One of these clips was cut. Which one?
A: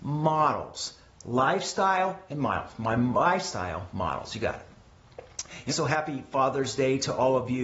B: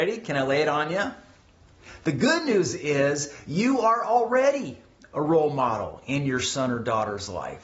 A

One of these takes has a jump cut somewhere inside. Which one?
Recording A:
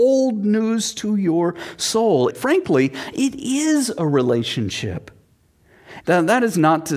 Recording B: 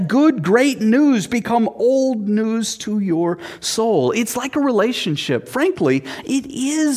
A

